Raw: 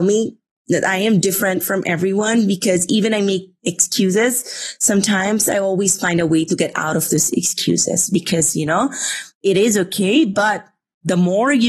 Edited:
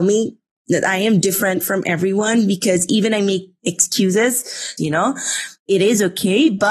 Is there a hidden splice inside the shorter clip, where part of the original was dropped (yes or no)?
yes